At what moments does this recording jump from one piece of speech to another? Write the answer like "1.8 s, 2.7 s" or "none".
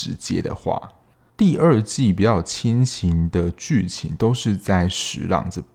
1.3 s